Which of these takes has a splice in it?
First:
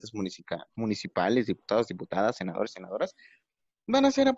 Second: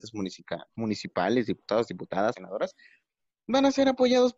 second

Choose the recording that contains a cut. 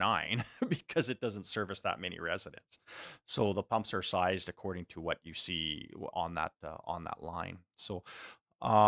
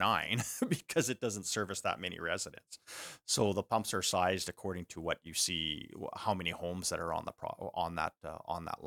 first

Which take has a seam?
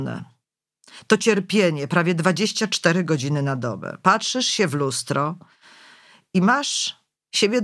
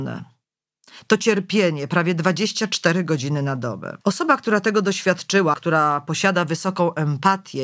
second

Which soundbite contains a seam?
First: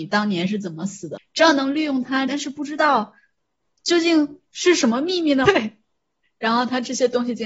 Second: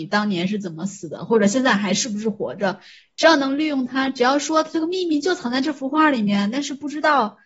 first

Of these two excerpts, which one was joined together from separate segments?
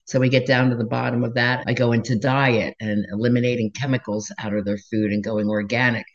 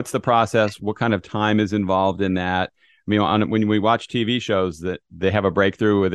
first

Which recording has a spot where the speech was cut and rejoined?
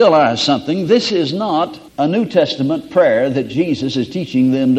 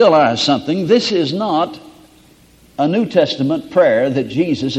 first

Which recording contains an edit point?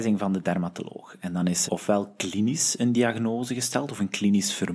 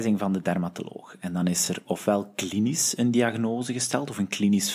first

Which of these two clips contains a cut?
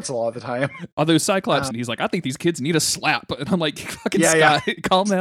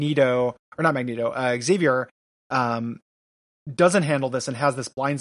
first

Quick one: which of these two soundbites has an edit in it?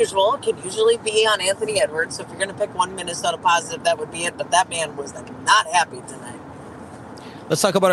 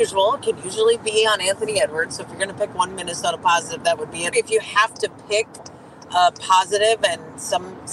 second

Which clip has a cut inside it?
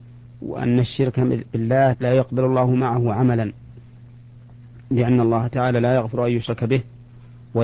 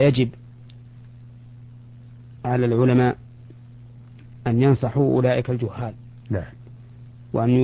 first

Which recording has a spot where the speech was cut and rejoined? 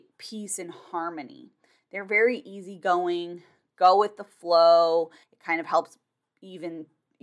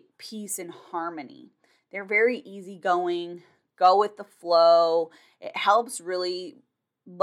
first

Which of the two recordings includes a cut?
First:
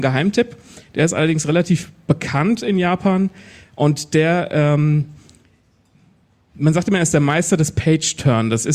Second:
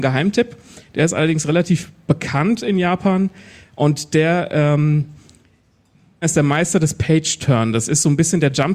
second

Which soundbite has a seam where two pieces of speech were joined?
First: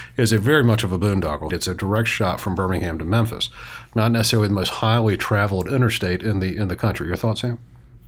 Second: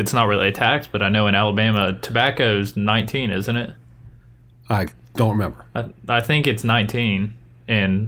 first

